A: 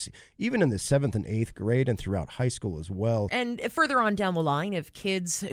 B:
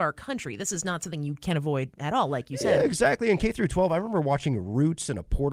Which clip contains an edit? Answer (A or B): A